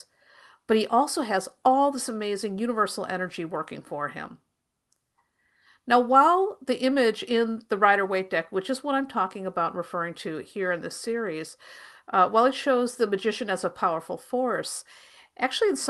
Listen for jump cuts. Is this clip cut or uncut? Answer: uncut